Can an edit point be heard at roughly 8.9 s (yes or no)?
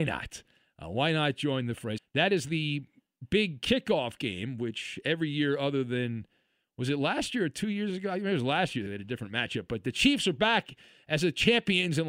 yes